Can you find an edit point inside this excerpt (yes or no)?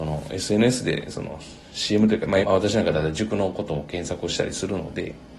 yes